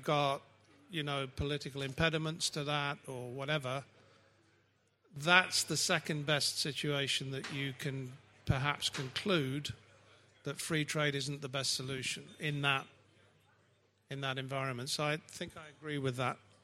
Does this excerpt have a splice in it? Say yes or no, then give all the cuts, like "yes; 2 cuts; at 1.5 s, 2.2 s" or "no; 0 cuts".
no; 0 cuts